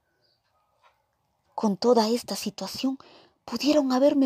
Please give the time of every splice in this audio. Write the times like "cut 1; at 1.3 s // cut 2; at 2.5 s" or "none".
cut 1; at 1.5 s